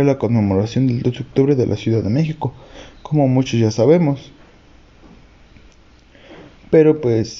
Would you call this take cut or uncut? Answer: uncut